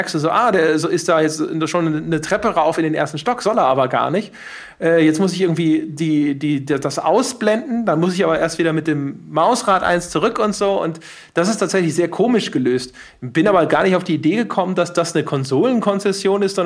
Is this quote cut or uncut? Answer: uncut